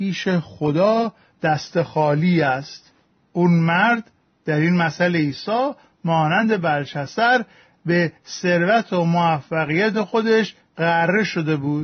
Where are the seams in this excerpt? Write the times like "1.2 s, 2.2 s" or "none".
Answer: none

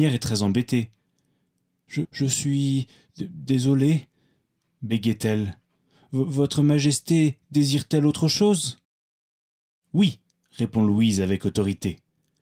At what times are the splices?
2.0 s

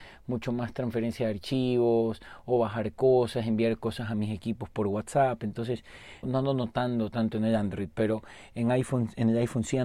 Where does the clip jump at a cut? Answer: 6.2 s

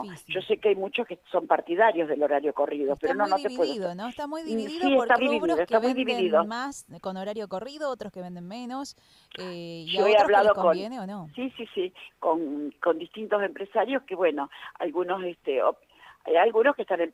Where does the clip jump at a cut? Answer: 5.2 s

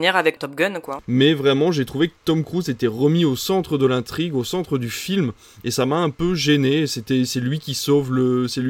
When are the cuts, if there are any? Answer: 1.0 s

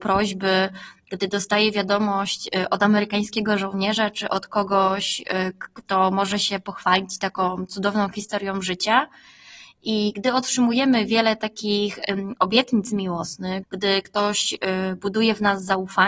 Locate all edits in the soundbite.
13.6 s

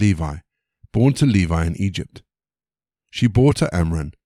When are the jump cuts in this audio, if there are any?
none

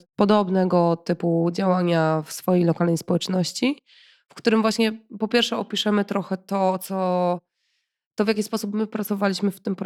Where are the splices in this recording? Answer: none

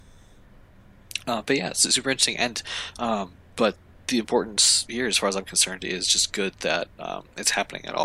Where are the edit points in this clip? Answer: none

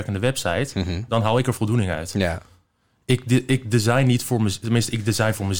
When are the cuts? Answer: none

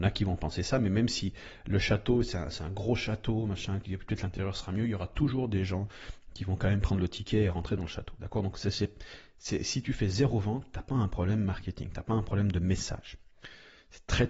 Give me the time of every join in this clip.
none

